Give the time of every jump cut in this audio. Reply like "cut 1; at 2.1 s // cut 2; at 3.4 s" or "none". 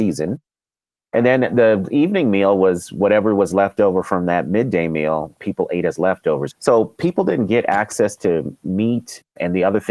cut 1; at 6.5 s